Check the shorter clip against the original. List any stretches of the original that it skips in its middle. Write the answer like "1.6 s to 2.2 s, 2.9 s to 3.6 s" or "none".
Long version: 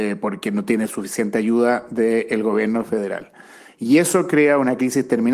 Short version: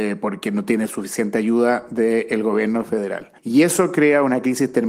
3.4 s to 3.7 s